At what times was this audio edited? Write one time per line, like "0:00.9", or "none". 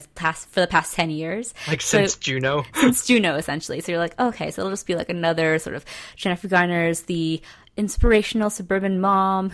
none